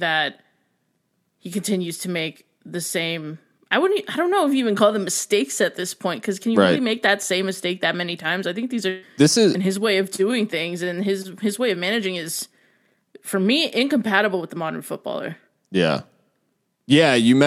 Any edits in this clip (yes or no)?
yes